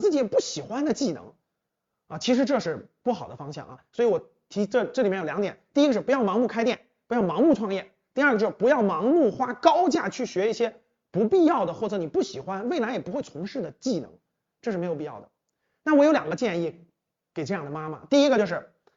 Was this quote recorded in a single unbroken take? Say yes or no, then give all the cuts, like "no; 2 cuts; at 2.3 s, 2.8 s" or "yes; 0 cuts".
yes; 0 cuts